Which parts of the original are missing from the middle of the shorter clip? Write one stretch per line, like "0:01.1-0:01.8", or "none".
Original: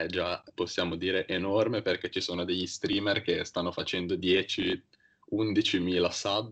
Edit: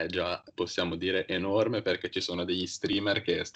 none

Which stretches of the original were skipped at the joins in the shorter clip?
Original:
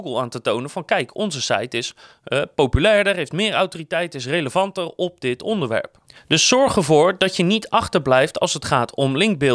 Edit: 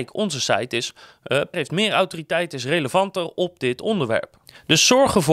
0:02.5-0:03.1

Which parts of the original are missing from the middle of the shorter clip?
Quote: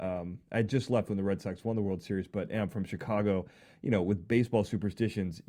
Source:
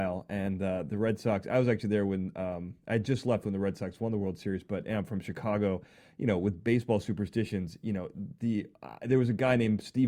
none

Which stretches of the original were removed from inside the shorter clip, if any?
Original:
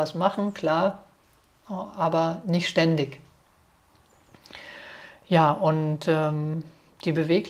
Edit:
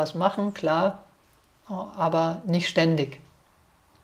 none

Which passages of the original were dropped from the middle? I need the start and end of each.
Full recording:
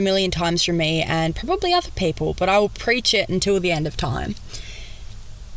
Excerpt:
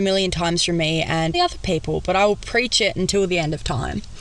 0:01.3-0:01.7

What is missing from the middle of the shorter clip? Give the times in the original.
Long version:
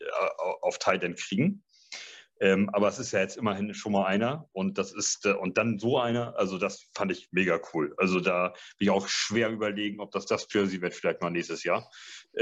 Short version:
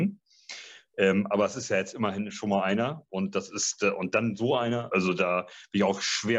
0:06.3-0:08.0

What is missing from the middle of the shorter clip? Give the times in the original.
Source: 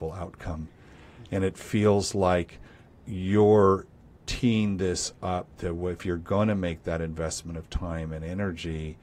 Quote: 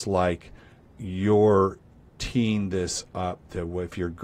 none

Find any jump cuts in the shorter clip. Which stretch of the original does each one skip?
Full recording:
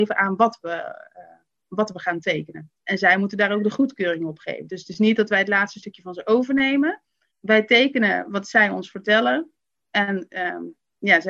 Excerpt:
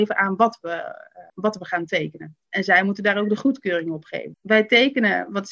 0:01.3-0:01.6
0:04.7-0:07.3

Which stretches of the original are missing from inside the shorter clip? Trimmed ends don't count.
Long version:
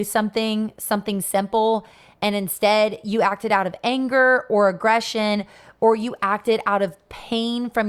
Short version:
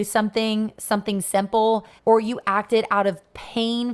0:02.0-0:05.7

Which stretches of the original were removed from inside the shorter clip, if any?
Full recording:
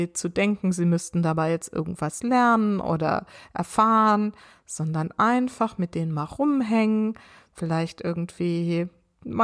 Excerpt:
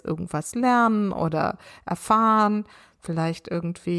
0:04.6-0:07.4

